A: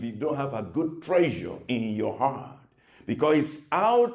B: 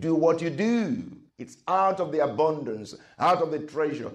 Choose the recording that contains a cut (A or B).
B